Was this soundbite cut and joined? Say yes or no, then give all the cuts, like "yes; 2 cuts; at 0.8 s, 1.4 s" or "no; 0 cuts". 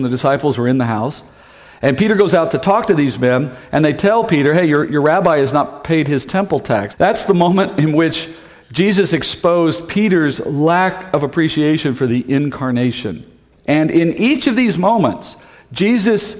yes; 2 cuts; at 6.9 s, 13.5 s